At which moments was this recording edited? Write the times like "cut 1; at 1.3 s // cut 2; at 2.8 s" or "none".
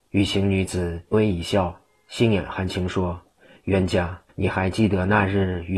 cut 1; at 1.1 s // cut 2; at 4.3 s